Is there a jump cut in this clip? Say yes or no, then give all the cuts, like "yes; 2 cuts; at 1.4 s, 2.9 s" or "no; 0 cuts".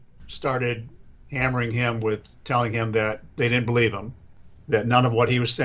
no; 0 cuts